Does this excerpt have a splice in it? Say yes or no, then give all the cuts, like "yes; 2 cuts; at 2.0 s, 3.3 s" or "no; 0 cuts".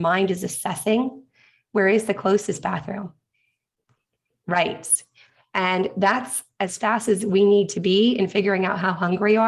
no; 0 cuts